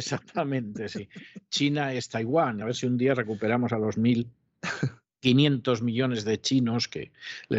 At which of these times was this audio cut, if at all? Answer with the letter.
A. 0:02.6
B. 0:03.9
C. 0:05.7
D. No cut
A